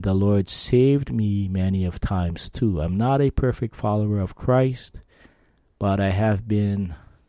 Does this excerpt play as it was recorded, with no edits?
yes; 0 cuts

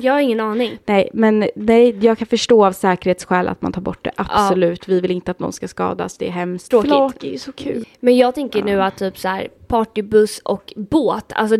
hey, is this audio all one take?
no; 2 cuts; at 6.7 s, 7.8 s

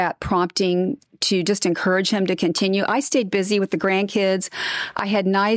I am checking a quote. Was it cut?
no; 0 cuts

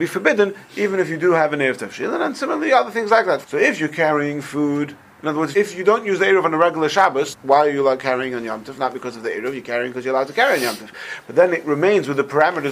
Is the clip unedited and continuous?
no; 3 cuts; at 3.4 s, 5.5 s, 7.3 s

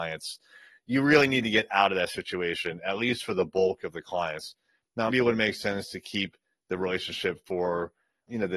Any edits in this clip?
yes; 1 cut; at 5.1 s

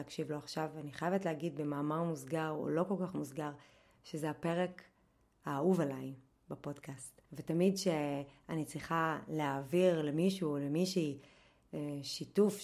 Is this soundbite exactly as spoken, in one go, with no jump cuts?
no; 1 cut; at 7.3 s

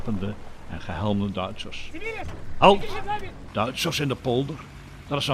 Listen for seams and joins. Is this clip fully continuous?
no; 1 cut; at 3.5 s

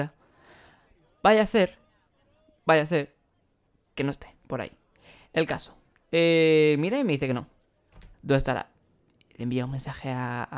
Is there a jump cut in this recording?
yes; 2 cuts; at 4.4 s, 8.1 s

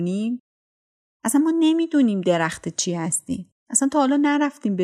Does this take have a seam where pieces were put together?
yes; 1 cut; at 3.6 s

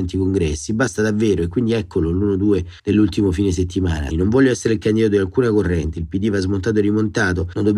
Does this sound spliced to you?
yes; 1 cut; at 4.1 s

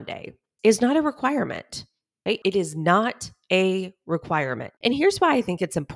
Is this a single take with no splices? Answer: no; 2 cuts; at 2.4 s, 4.8 s

